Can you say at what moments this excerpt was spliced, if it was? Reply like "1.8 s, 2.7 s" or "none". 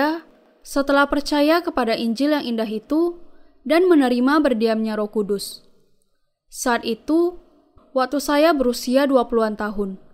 7.8 s